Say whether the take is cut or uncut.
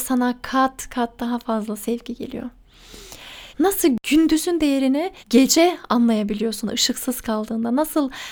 cut